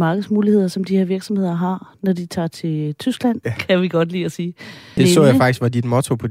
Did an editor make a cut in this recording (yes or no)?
yes